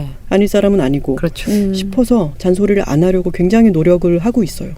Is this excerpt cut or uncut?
uncut